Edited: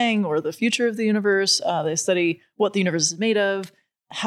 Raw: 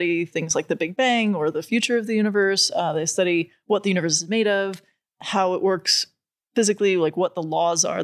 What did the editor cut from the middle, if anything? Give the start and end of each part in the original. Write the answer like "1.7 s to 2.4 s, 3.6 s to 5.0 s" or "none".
none

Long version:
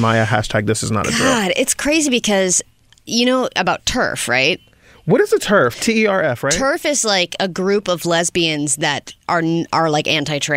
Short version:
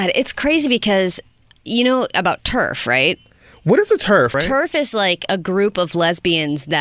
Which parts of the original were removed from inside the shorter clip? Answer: 5.8 s to 6.4 s

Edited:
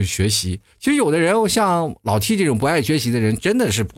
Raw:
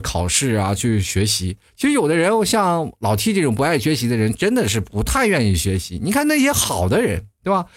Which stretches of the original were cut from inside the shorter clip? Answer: none

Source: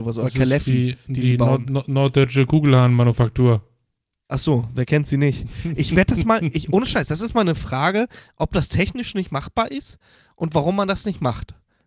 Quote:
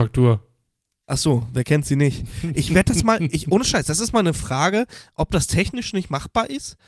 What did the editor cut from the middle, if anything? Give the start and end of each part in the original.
none

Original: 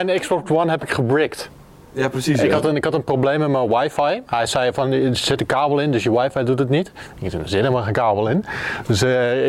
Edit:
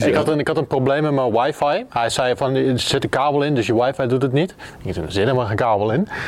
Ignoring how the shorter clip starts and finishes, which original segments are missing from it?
none

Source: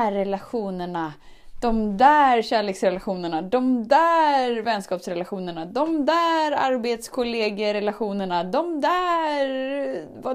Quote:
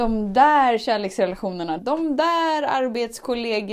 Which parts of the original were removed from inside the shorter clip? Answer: 3.4 s to 5.7 s

